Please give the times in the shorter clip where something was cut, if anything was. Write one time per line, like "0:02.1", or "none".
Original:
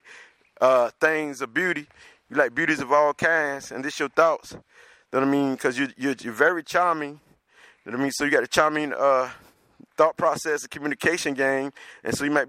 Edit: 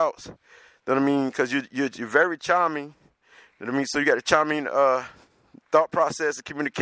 none